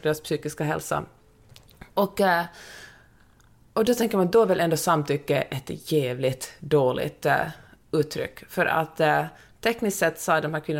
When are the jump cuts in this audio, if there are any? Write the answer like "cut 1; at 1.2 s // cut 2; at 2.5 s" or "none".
none